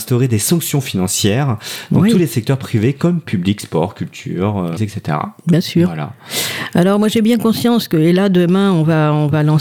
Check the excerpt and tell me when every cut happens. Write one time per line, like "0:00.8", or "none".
0:04.8